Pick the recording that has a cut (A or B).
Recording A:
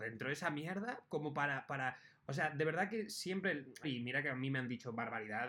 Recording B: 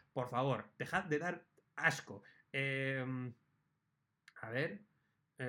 A